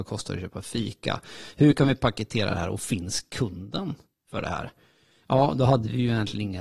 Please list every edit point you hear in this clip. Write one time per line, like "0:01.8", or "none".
0:05.2